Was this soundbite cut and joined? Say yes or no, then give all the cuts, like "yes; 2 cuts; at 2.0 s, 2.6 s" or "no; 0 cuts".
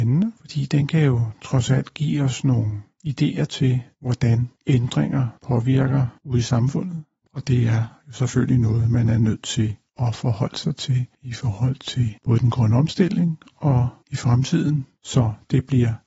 yes; 2 cuts; at 7.3 s, 15.0 s